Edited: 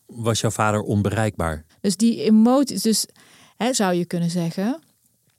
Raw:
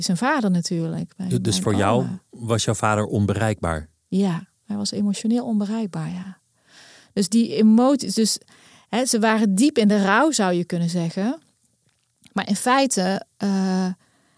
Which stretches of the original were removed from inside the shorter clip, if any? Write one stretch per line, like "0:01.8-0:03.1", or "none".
0:03.9-0:07.0
0:09.0-0:10.3